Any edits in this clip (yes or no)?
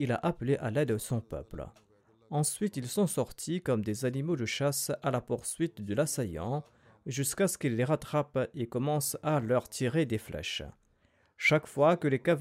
no